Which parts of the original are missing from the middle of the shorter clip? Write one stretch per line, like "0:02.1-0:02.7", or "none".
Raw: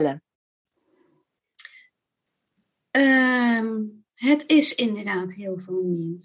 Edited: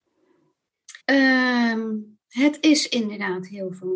0:01.7-0:02.9